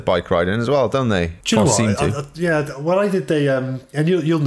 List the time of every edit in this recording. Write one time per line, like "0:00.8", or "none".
none